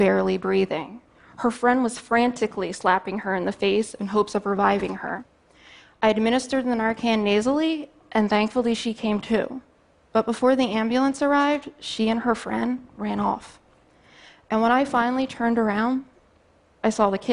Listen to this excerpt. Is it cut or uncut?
uncut